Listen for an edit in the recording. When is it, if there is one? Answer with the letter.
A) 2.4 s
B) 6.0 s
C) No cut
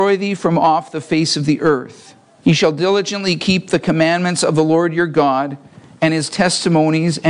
A